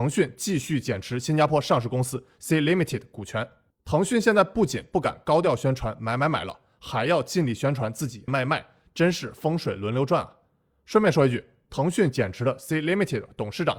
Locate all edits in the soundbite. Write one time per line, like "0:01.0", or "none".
0:08.3